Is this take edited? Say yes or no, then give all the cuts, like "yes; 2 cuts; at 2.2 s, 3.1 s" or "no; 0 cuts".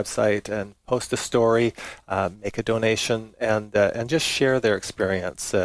no; 0 cuts